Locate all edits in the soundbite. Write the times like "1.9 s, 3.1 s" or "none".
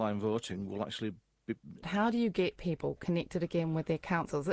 1.8 s